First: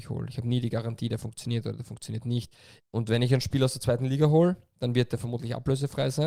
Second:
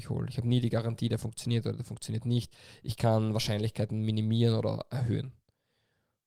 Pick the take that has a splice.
first; 1 cut; at 2.8 s

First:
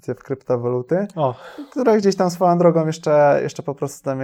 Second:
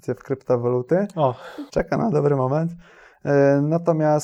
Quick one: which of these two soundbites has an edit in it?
second; 1 cut; at 1.7 s

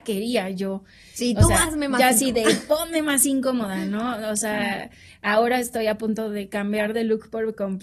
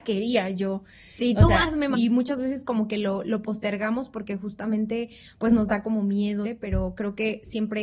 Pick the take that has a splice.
second; 2 cuts; at 1.9 s, 6.4 s

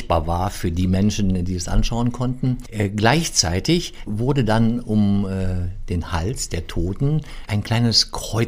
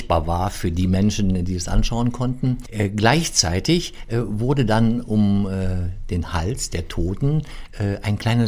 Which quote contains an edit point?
first; 2 cuts; at 4.1 s, 7.5 s

